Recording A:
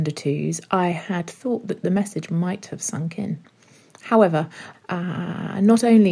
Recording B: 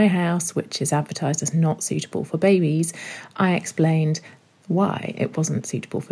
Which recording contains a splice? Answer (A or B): A